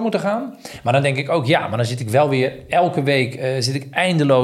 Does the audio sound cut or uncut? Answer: uncut